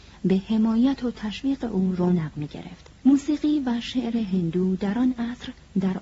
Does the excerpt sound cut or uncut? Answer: cut